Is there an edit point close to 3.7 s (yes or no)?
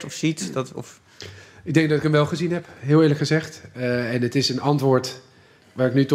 no